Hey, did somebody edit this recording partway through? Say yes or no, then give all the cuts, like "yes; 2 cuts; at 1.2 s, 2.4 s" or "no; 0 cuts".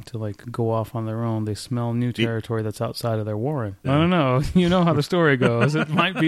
yes; 1 cut; at 3.8 s